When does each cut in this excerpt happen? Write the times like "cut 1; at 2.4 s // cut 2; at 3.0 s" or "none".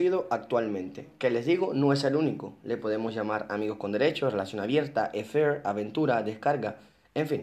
none